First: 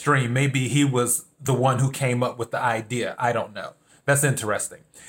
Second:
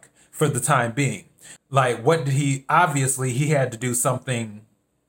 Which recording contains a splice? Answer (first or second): second